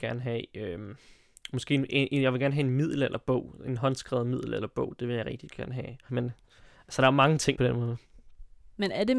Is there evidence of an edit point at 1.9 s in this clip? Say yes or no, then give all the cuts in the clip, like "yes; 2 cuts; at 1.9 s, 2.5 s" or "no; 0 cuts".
no; 2 cuts; at 6.1 s, 7.5 s